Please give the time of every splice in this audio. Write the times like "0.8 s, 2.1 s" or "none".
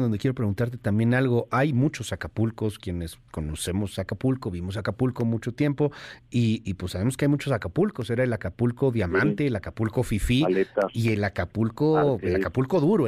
none